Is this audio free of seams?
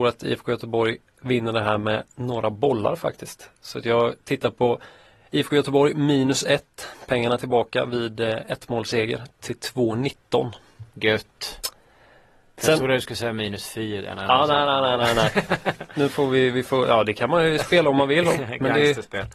yes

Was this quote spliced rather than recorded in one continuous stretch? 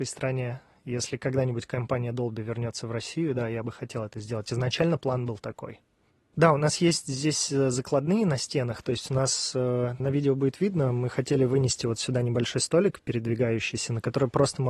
yes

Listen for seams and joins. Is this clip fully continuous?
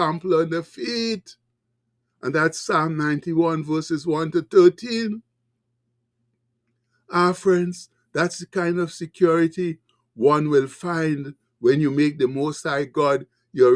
yes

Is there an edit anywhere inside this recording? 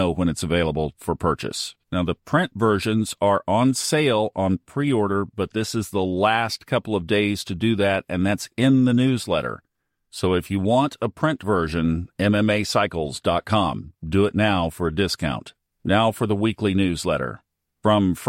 no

